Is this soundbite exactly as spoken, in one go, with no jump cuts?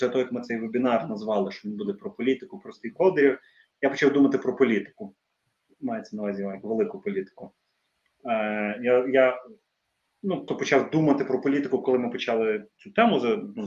no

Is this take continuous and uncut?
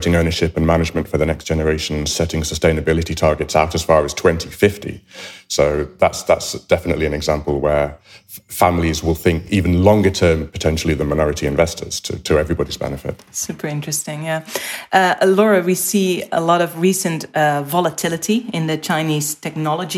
yes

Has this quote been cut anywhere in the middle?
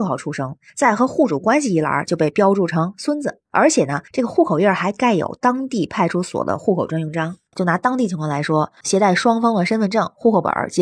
yes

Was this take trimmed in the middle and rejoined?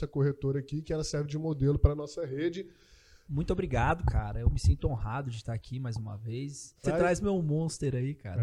yes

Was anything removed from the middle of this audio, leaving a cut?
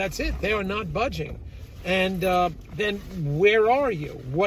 no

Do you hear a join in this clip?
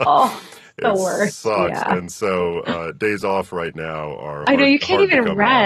no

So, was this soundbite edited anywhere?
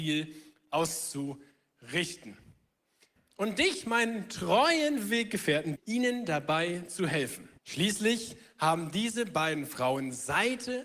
yes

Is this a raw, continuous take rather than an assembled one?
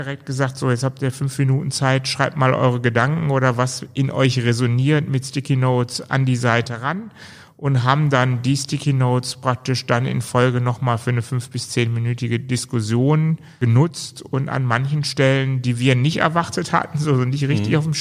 yes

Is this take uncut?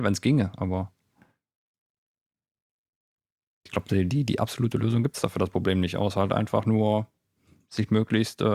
yes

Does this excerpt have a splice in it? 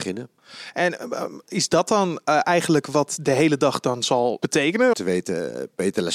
yes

